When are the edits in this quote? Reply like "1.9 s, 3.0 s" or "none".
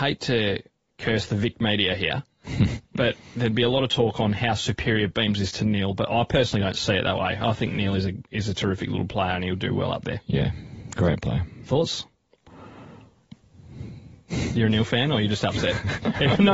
none